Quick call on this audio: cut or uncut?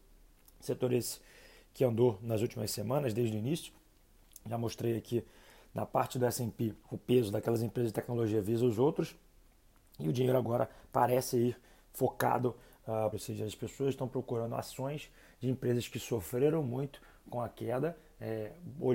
cut